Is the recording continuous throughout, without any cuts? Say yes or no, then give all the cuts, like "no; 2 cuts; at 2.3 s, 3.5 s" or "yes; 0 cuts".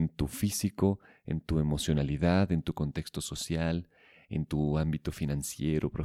yes; 0 cuts